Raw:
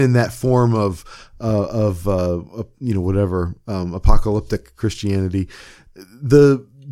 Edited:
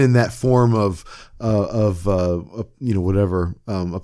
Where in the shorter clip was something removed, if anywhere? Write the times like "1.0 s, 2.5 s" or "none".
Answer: none